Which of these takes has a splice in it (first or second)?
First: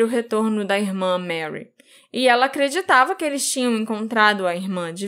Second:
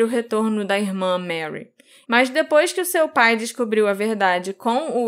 second